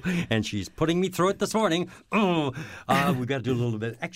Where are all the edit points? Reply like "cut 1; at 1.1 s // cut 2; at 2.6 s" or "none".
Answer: none